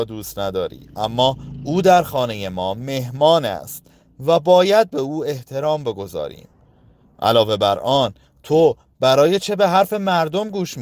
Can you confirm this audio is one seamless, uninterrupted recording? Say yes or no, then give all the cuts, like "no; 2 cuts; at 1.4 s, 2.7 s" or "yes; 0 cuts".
yes; 0 cuts